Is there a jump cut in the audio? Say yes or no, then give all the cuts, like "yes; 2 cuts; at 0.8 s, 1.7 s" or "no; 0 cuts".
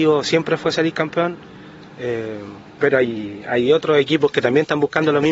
no; 0 cuts